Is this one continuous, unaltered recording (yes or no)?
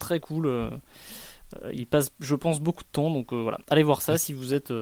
yes